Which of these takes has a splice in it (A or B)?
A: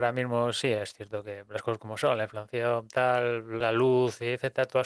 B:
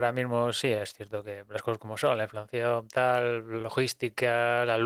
A